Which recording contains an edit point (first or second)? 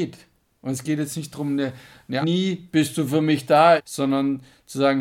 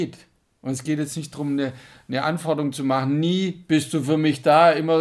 first